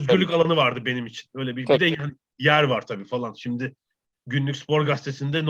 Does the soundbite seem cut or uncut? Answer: uncut